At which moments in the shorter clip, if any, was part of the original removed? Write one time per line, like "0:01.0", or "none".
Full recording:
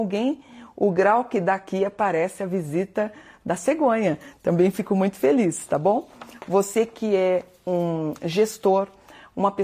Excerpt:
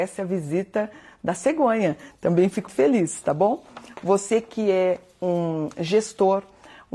0:02.7